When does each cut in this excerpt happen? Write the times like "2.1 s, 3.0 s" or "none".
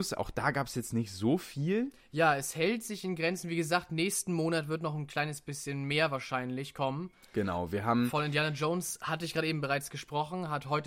none